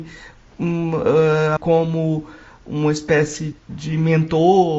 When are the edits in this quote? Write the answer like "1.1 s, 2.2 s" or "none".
1.6 s, 3.5 s